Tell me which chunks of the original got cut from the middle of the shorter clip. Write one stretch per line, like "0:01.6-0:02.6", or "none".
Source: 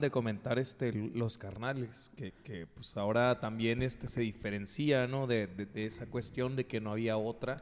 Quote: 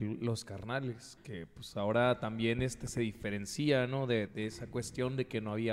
0:02.1-0:02.4
0:05.5-0:05.7